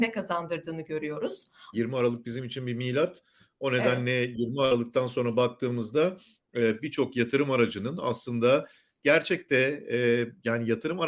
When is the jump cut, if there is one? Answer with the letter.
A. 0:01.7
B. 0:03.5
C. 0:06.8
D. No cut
A